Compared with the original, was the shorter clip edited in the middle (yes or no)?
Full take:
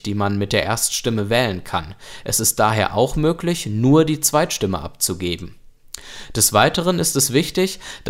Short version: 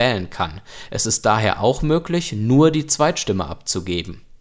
no